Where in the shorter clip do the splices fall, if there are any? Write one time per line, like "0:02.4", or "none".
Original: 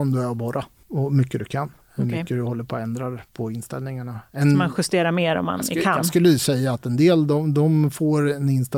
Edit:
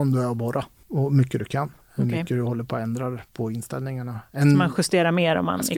none